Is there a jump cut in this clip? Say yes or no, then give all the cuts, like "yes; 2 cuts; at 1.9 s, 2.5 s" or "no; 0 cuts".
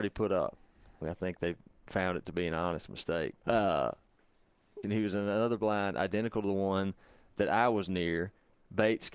yes; 3 cuts; at 1.0 s, 3.4 s, 4.8 s